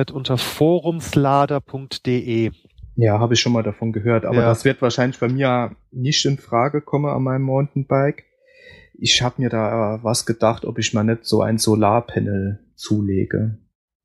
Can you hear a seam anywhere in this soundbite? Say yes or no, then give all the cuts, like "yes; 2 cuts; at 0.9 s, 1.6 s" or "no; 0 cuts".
no; 0 cuts